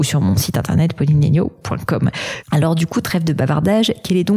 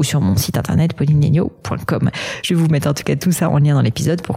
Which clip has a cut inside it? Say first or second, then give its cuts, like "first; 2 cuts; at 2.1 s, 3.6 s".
first; 1 cut; at 2.4 s